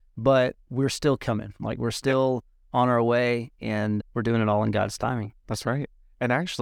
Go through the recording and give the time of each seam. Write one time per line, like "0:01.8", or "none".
0:04.0